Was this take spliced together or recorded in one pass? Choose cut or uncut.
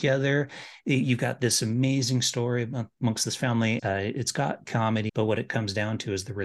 cut